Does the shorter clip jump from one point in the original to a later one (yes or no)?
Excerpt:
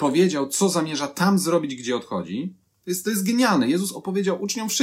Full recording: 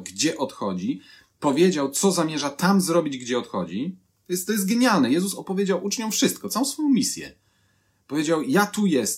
no